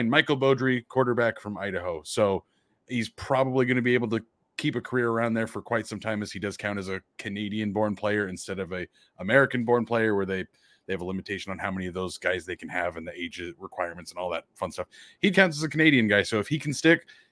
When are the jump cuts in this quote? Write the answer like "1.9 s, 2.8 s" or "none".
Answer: 15.3 s